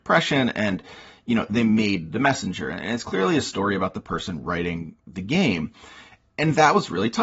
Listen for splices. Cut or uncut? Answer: uncut